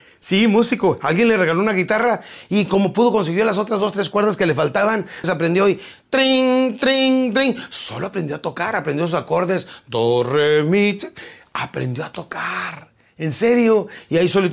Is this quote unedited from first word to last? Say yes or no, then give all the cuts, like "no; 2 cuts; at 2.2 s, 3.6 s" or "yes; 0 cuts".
no; 1 cut; at 5.2 s